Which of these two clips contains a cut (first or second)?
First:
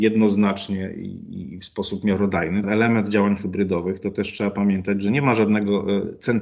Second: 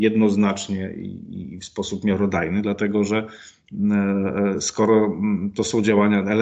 first